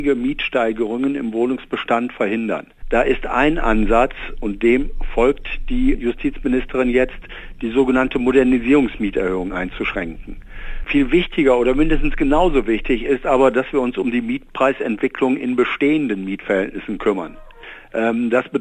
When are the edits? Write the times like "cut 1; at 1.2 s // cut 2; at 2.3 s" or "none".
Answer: cut 1; at 5.9 s // cut 2; at 10.8 s